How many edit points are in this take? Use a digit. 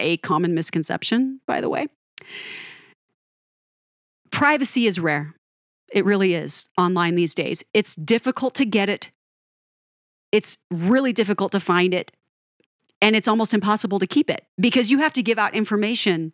0